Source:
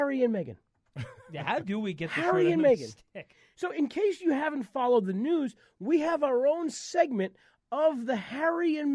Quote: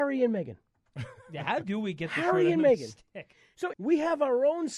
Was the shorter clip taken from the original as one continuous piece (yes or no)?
no